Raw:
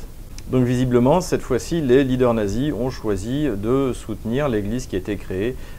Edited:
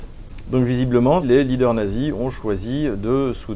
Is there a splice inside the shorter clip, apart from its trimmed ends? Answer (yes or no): yes